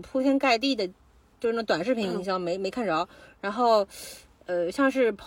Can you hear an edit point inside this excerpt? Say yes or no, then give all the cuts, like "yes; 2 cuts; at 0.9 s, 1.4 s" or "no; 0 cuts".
no; 0 cuts